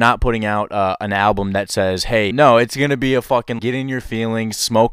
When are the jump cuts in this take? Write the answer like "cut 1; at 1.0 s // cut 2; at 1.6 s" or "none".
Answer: cut 1; at 2.3 s // cut 2; at 3.6 s